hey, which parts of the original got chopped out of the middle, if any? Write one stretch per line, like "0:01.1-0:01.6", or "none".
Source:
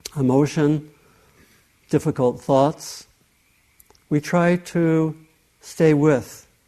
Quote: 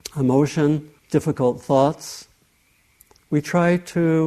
0:01.0-0:01.8